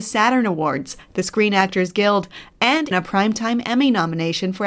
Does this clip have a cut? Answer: yes; 1 cut; at 2.9 s

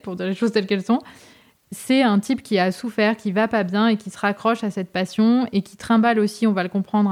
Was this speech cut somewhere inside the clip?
no; 0 cuts

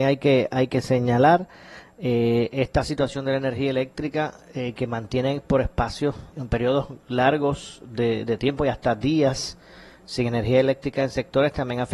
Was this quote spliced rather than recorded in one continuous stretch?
yes; 1 cut; at 6.3 s

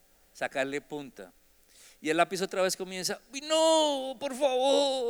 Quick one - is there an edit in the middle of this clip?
no; 0 cuts

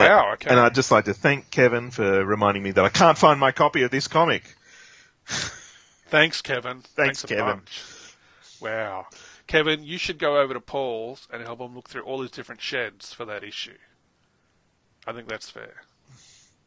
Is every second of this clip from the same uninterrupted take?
yes; 0 cuts

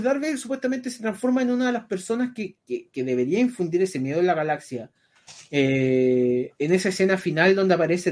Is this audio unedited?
no; 2 cuts; at 5.5 s, 6.5 s

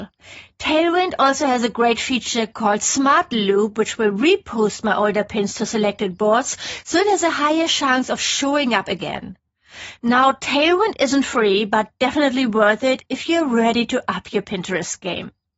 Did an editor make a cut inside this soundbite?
no; 0 cuts

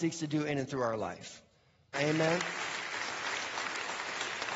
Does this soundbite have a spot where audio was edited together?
yes; 1 cut; at 1.9 s

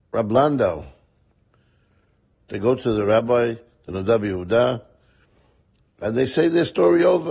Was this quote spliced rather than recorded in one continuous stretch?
yes; 1 cut; at 2.3 s

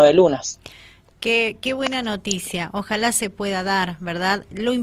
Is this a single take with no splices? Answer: yes; 0 cuts

